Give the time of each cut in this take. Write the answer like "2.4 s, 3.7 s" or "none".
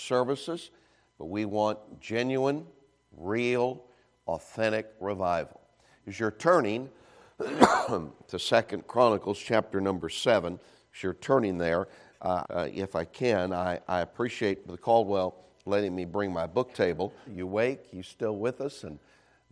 12.4 s, 17.3 s